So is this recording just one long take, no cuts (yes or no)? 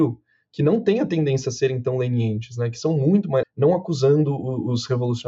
no